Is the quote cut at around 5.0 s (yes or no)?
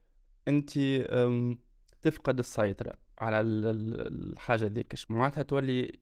yes